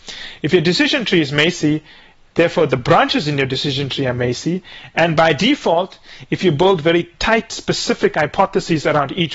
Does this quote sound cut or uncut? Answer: uncut